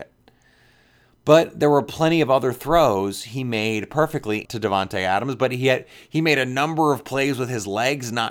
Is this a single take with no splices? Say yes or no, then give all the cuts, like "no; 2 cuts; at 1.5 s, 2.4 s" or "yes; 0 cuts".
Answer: no; 1 cut; at 4.4 s